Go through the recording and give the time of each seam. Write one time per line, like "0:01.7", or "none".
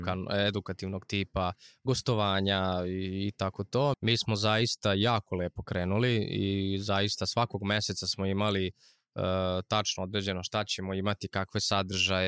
0:03.9